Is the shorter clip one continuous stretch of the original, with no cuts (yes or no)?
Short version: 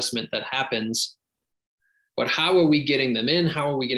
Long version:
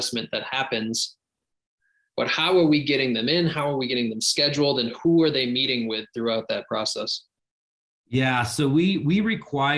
yes